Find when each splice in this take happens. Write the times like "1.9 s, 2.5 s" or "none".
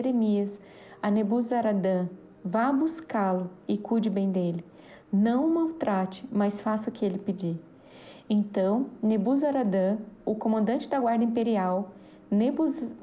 none